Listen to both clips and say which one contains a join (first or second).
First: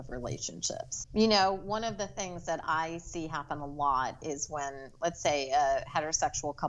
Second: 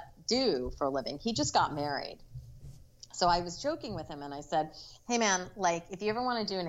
first